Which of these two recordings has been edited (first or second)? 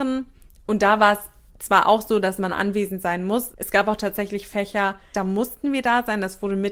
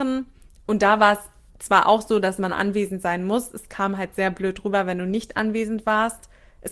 first